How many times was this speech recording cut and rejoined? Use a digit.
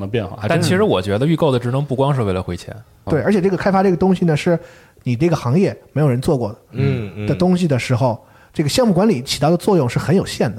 1